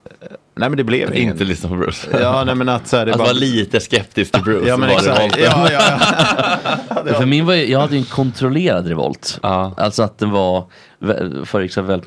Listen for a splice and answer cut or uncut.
uncut